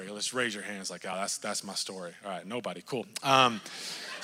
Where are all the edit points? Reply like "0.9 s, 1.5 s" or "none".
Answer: none